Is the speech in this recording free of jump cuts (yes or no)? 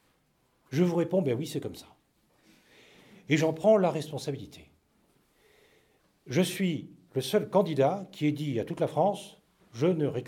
yes